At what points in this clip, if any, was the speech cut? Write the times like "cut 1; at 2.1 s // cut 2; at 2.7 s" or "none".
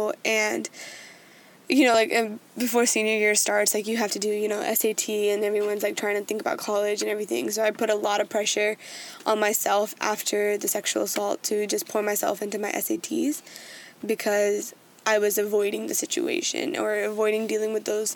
none